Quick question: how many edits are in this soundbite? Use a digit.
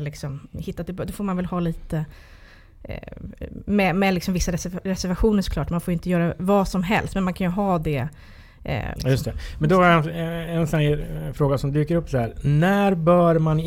1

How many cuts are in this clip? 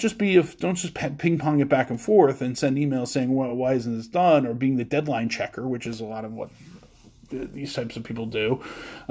0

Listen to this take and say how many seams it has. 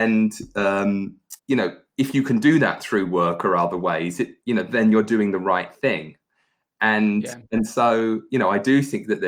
1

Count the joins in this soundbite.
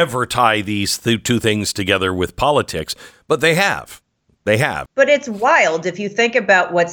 1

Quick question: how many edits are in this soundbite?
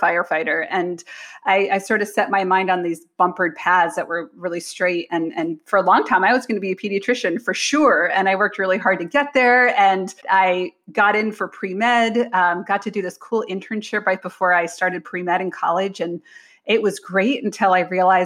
1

